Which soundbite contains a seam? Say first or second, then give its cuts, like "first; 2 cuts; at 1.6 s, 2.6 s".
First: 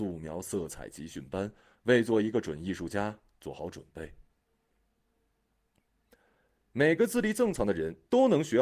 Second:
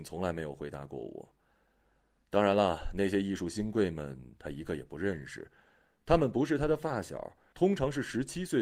second; 1 cut; at 7.5 s